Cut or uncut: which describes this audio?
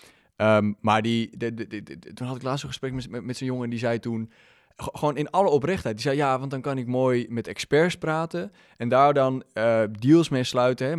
uncut